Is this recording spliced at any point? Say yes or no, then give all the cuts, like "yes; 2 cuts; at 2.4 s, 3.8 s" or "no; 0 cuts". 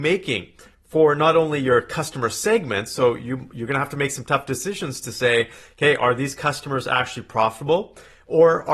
no; 0 cuts